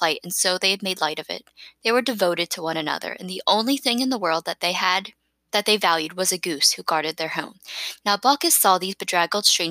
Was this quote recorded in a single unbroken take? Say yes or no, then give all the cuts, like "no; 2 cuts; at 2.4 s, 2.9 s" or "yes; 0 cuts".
yes; 0 cuts